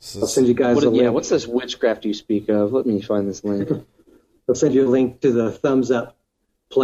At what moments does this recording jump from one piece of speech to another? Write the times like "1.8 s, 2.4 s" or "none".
none